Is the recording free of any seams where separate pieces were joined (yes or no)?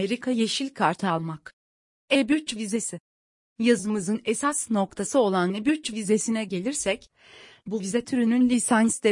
yes